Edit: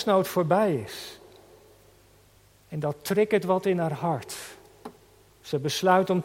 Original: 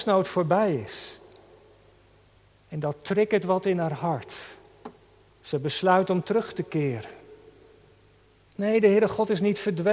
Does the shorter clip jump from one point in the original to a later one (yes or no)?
no